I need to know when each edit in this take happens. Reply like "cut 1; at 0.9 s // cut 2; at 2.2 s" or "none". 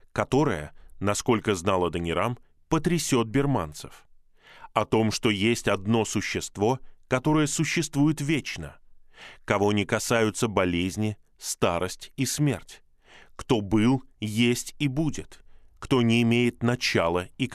none